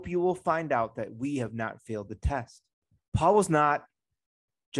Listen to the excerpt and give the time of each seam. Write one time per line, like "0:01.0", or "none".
0:03.0